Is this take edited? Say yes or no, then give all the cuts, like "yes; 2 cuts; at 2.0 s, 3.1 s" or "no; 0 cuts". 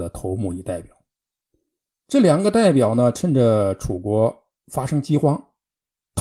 no; 0 cuts